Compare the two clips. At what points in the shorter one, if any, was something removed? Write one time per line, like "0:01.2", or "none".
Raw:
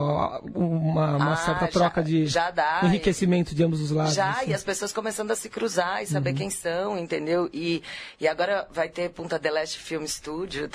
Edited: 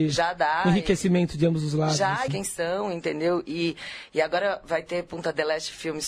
0:02.3